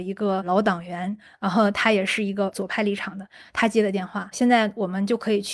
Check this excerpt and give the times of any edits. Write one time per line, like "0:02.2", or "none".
0:04.3